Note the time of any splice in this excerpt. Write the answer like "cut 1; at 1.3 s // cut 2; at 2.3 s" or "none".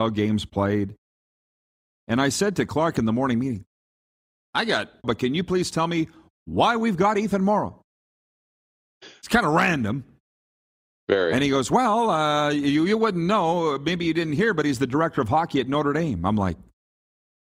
cut 1; at 5.0 s